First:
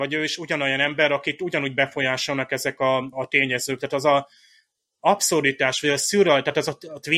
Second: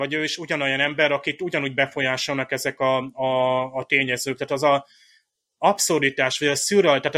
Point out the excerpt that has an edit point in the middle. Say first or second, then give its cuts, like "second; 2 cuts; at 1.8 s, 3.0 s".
first; 1 cut; at 3.1 s